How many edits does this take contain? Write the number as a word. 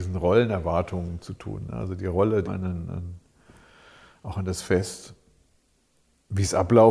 one